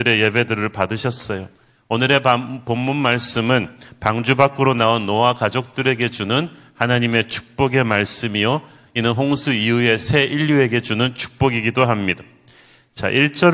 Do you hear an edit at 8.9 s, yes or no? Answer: no